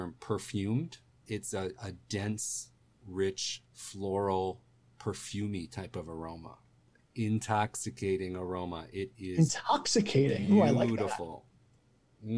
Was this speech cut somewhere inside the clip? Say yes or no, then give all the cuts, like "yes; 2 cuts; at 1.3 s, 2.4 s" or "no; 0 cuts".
no; 0 cuts